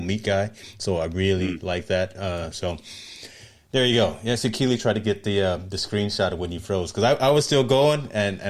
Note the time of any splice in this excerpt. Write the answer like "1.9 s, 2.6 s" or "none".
none